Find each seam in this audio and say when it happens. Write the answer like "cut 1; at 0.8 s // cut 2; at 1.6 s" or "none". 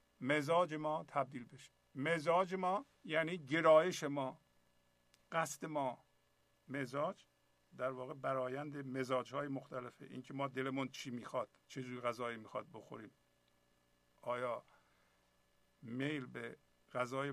cut 1; at 2.9 s // cut 2; at 11.6 s